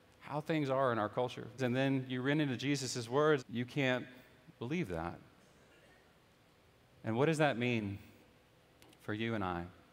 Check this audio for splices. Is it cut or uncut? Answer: cut